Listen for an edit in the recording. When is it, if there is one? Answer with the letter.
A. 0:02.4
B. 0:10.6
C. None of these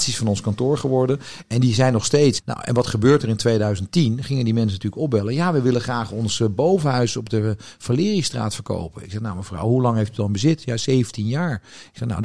A